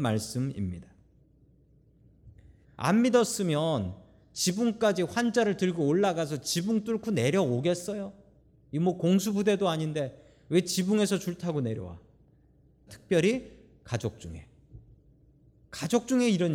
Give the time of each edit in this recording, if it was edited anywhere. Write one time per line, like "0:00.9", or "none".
0:02.6
0:12.9

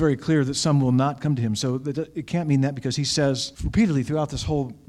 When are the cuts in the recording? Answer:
0:03.5

